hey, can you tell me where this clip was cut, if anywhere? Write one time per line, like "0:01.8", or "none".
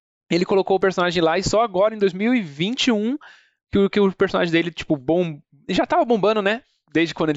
none